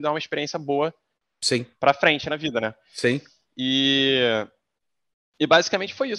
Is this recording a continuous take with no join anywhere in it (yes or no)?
yes